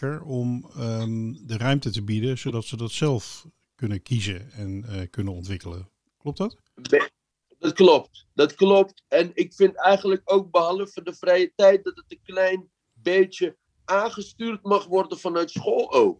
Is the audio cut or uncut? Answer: uncut